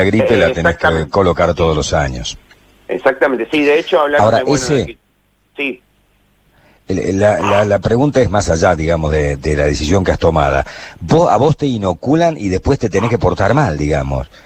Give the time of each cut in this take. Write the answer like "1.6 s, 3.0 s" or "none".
9.4 s